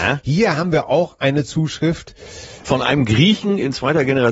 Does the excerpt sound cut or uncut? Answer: uncut